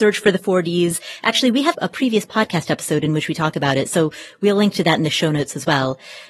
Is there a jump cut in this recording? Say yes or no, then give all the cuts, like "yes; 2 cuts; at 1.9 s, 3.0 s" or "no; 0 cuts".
yes; 1 cut; at 1.7 s